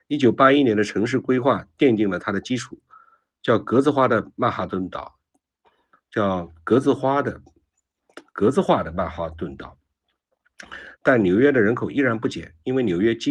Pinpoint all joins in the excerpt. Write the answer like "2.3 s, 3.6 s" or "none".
10.9 s